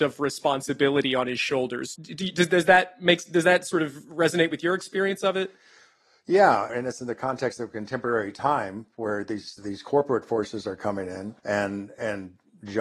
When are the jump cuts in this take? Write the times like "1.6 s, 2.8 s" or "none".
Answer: 1.9 s, 6.7 s, 11.4 s